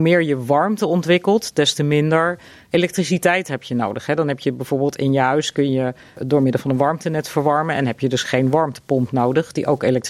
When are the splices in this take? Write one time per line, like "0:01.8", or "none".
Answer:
none